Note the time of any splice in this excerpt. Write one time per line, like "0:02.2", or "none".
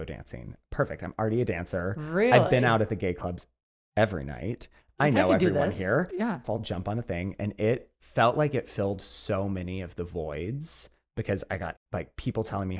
0:06.4